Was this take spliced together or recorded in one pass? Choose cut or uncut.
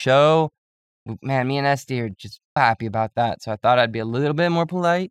cut